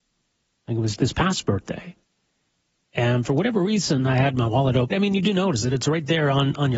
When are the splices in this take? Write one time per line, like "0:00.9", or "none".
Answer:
0:01.0
0:04.9